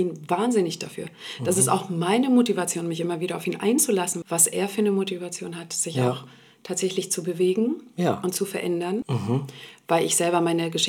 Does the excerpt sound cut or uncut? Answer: cut